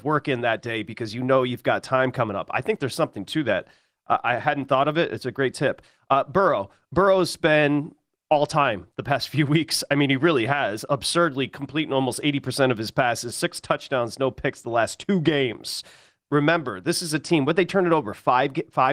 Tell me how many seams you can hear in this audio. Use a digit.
1